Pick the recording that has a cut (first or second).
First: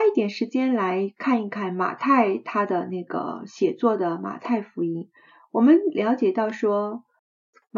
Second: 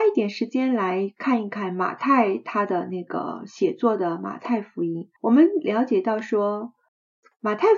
second